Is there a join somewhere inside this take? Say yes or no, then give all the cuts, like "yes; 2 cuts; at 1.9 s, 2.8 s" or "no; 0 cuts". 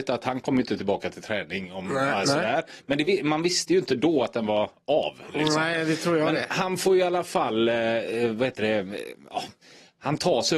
no; 0 cuts